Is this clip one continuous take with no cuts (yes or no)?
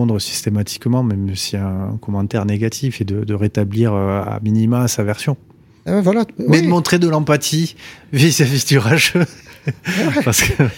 yes